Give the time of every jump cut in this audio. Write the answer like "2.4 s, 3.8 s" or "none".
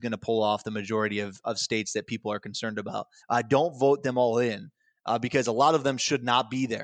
3.2 s